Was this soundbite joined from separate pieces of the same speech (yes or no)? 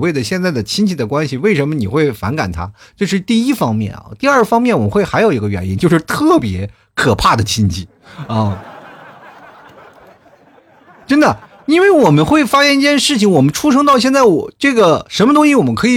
no